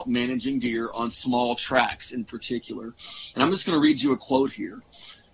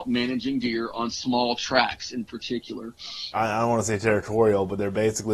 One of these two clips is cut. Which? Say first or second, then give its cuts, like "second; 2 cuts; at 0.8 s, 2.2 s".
second; 1 cut; at 3.3 s